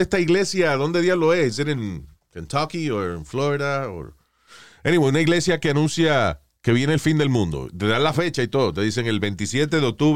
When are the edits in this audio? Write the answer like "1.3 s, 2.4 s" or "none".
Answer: none